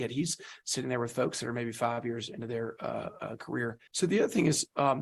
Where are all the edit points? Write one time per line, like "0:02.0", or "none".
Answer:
0:03.9